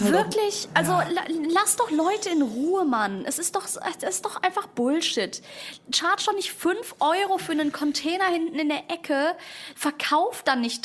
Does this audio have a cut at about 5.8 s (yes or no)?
no